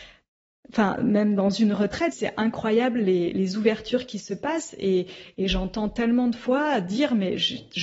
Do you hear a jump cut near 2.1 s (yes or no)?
yes